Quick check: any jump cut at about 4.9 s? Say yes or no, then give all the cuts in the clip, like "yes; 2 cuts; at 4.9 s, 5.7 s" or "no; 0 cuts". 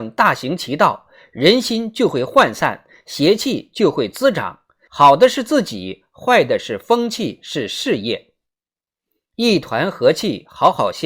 yes; 1 cut; at 4.9 s